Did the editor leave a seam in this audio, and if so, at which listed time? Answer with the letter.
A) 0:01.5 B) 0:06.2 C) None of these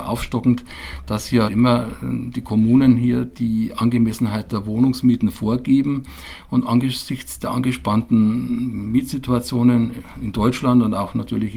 A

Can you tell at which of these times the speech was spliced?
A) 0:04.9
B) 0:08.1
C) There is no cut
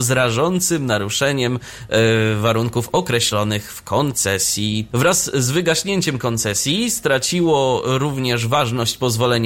A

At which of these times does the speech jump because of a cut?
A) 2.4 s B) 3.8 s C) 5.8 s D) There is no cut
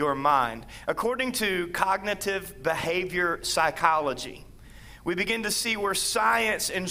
D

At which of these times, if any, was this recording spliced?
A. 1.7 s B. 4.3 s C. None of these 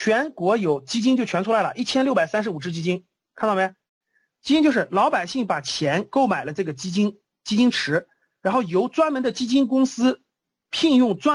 B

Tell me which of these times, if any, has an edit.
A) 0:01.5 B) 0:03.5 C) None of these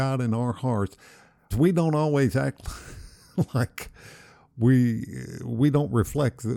A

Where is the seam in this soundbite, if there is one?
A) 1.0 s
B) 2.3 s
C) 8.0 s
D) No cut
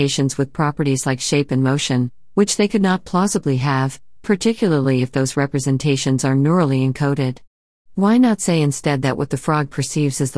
D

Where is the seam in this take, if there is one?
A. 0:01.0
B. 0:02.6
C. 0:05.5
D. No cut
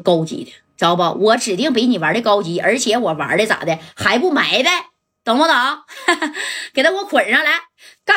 D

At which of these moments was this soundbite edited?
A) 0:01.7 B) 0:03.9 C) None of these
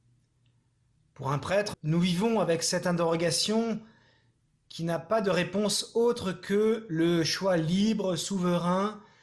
A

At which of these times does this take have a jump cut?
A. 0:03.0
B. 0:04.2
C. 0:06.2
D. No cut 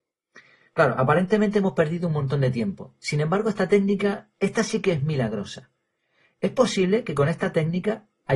D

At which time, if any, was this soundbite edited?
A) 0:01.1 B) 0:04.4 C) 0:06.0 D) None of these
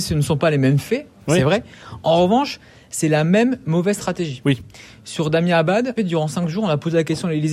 C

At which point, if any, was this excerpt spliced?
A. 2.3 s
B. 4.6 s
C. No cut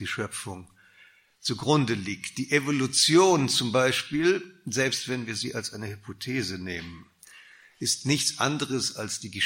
C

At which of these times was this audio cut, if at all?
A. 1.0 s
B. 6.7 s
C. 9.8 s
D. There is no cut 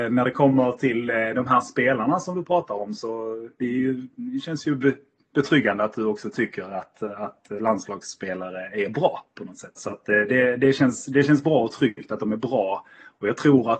C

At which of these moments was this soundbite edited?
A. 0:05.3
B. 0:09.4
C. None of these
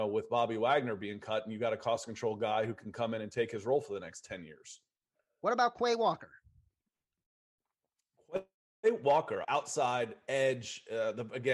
B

